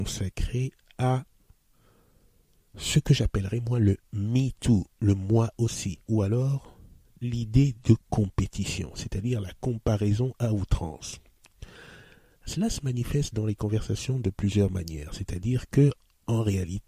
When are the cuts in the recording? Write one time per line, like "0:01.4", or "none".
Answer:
none